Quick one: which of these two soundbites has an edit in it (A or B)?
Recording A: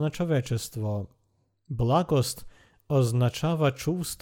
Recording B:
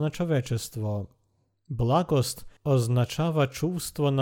B